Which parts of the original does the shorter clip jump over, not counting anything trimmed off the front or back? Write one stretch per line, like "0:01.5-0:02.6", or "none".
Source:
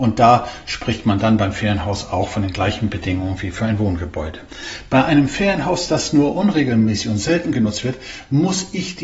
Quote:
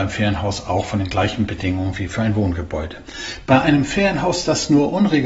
none